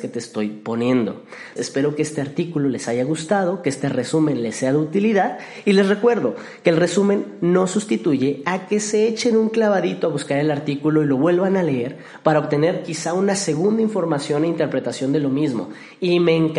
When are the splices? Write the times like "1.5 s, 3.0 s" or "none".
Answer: 1.6 s